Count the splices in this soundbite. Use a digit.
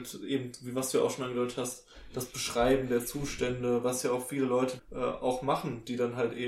1